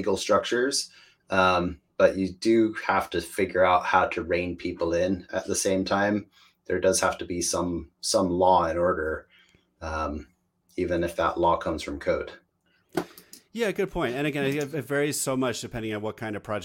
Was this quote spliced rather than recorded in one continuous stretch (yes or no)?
no